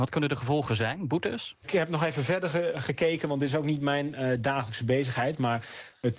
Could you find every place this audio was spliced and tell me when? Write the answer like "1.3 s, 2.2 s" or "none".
1.6 s